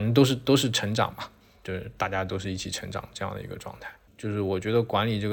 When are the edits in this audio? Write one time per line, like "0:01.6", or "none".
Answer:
0:04.1